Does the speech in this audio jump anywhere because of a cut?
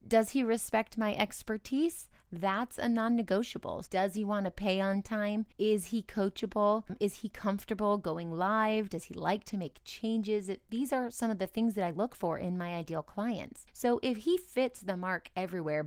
yes; 1 cut; at 3.8 s

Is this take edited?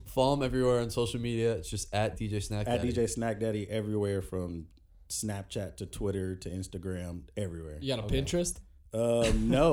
no; 0 cuts

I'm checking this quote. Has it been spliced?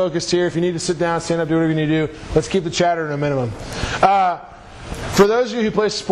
no; 0 cuts

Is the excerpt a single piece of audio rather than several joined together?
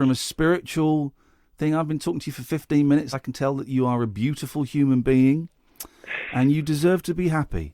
yes; 0 cuts

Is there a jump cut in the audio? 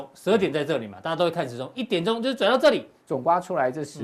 yes; 1 cut; at 3.0 s

